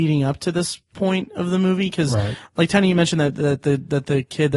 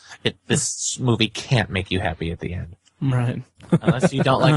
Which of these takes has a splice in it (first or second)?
second